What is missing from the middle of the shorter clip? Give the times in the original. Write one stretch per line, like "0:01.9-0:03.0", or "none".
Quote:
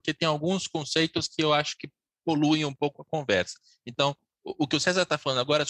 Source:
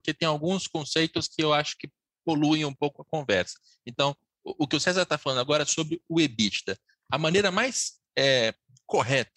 none